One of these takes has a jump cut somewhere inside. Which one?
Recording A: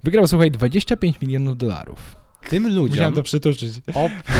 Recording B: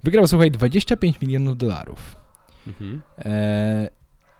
A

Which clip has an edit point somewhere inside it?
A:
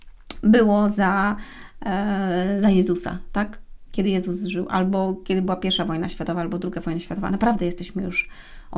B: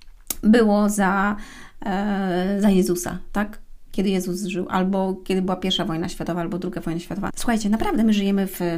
B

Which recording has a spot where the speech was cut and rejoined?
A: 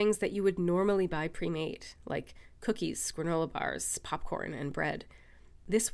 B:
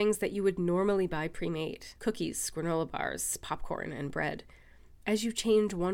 B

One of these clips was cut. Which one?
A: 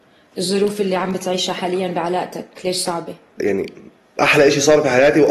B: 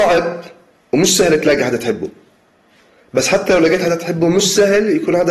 A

